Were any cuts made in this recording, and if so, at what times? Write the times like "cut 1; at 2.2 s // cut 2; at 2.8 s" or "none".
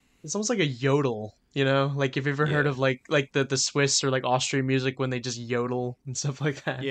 none